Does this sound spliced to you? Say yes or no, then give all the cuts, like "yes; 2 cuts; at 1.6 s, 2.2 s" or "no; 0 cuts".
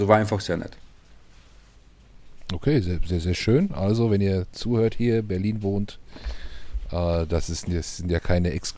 no; 0 cuts